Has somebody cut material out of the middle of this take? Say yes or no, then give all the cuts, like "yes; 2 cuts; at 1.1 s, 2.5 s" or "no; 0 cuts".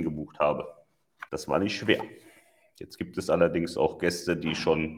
yes; 1 cut; at 1.3 s